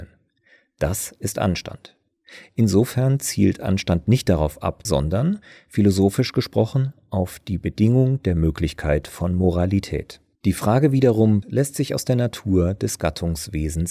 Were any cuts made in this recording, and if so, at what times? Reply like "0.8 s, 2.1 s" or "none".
4.9 s, 10.4 s, 11.4 s

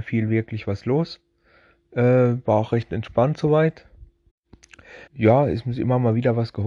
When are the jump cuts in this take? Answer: 5.1 s

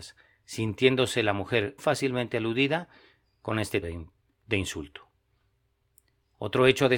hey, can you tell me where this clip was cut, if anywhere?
1.8 s, 3.8 s

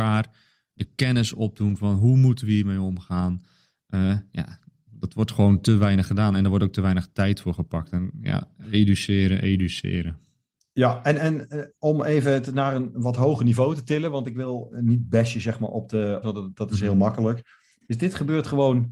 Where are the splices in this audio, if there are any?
8.6 s, 16.2 s

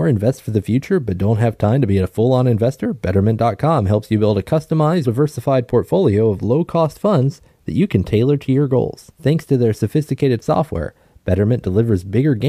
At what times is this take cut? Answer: 5.0 s, 9.1 s

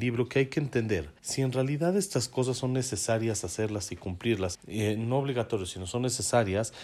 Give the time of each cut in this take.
1.2 s, 4.5 s

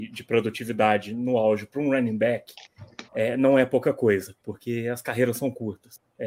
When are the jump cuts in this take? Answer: 3.1 s

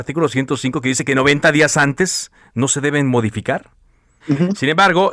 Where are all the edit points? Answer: 4.2 s

